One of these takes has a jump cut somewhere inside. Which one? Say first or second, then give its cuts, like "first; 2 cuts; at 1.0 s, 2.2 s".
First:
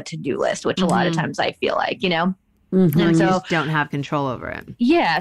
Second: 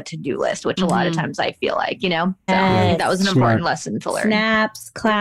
second; 1 cut; at 2.5 s